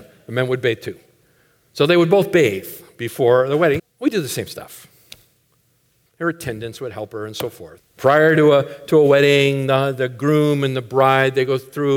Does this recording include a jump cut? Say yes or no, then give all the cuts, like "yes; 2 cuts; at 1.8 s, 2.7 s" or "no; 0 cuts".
yes; 3 cuts; at 3.8 s, 6.1 s, 7.8 s